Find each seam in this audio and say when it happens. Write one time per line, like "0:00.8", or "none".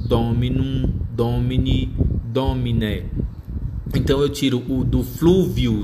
none